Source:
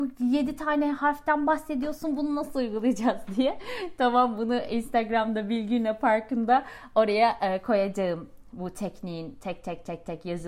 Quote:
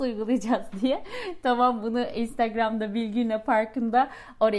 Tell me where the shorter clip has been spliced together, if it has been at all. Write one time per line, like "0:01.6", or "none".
none